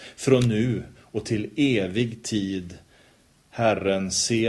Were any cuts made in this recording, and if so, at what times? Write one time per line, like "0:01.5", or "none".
none